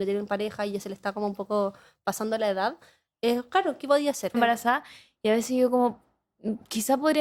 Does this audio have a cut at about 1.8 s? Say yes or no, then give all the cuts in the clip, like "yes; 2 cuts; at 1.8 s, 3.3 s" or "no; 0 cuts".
no; 1 cut; at 4.3 s